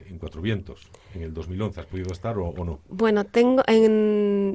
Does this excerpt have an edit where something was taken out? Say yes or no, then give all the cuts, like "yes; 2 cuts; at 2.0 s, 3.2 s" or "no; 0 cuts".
no; 0 cuts